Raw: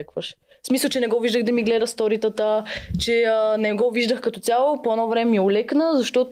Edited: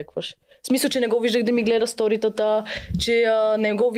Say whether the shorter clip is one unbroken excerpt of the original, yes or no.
yes